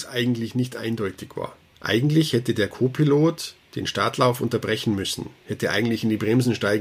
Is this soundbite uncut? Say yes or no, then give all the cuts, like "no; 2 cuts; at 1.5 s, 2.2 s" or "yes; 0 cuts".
no; 1 cut; at 1.7 s